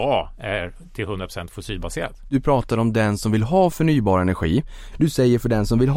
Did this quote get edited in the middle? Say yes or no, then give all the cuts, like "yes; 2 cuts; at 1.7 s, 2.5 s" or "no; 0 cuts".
yes; 1 cut; at 4.9 s